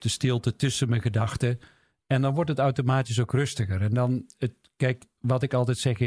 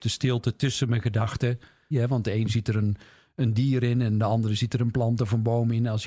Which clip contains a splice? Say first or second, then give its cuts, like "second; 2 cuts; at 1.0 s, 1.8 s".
second; 1 cut; at 1.9 s